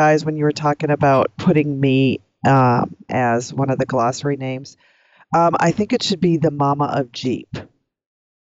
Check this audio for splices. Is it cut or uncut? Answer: cut